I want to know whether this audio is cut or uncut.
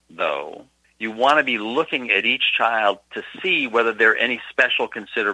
uncut